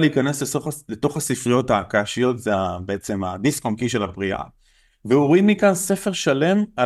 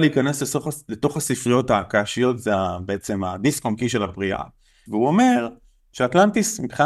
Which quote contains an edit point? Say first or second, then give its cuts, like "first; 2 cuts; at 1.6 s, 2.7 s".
second; 1 cut; at 4.9 s